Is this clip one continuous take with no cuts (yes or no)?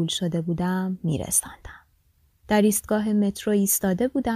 yes